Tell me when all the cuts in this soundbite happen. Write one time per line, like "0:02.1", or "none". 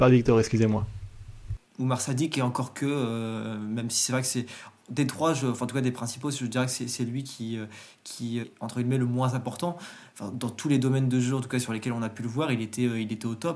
0:01.6
0:08.4
0:10.1